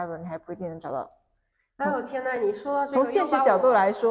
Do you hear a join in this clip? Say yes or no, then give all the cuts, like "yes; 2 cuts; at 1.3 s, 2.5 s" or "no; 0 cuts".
no; 0 cuts